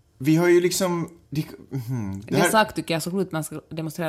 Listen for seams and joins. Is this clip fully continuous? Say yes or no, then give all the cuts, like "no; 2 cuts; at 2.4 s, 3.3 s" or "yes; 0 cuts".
no; 1 cut; at 1.2 s